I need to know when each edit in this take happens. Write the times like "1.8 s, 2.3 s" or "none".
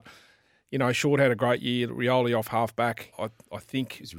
3.1 s